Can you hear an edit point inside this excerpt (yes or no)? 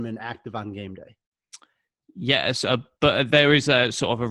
no